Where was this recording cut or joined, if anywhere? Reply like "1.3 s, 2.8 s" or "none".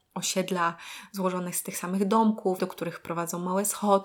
2.6 s